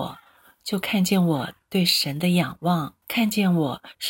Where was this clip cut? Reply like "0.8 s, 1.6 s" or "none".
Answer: 3.0 s